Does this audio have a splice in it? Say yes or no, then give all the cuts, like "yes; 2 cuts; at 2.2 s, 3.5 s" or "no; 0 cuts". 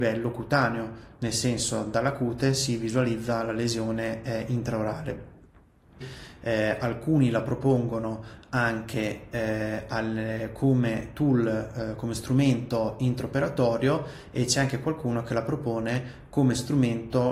no; 0 cuts